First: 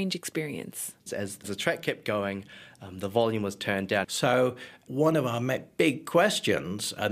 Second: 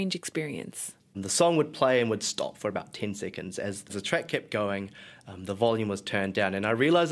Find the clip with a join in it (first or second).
first